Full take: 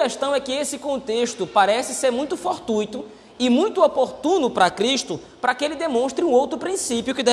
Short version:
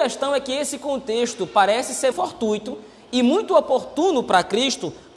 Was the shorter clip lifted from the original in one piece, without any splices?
no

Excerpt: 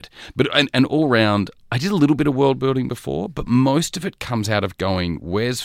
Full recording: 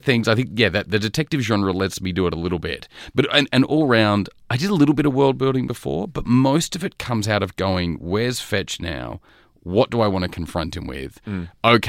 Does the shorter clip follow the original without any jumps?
yes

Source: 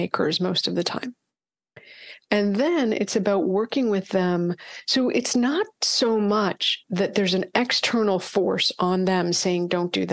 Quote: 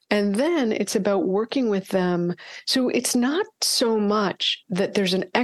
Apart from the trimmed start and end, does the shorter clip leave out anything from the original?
no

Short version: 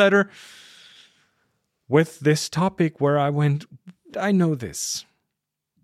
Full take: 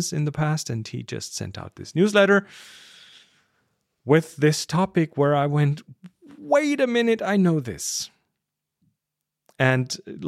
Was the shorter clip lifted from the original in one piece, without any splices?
no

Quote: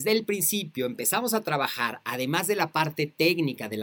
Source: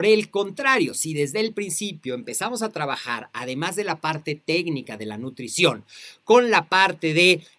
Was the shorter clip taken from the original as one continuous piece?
yes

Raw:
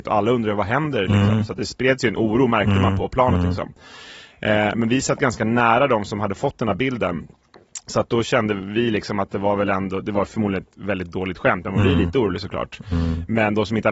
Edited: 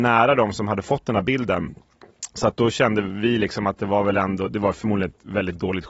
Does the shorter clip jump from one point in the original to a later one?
no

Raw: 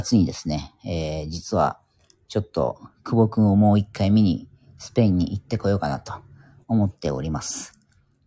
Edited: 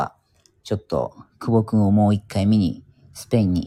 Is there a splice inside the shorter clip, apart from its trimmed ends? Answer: no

